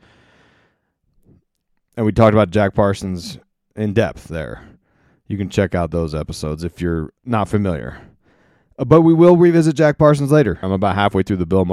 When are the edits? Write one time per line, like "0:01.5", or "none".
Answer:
0:10.6